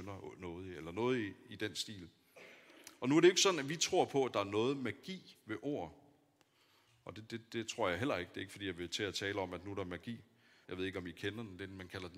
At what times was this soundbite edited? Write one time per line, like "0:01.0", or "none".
0:10.6